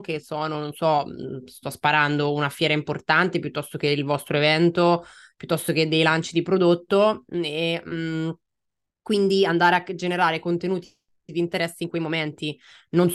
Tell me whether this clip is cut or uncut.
uncut